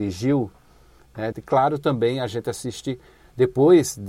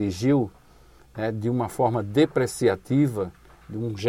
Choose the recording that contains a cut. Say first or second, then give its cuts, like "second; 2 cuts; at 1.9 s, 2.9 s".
first; 1 cut; at 1.3 s